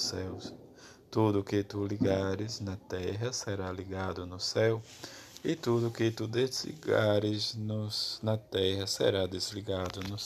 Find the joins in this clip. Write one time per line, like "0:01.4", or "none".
none